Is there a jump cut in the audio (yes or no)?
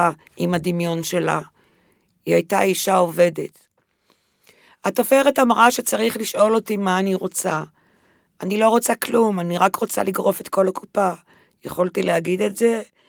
no